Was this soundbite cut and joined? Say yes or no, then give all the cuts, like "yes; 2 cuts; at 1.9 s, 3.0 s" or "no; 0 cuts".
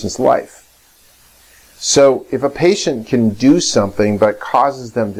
no; 0 cuts